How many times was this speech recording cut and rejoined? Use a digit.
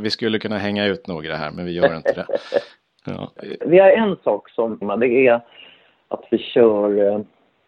2